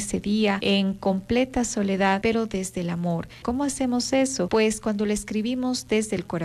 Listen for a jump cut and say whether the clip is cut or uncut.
cut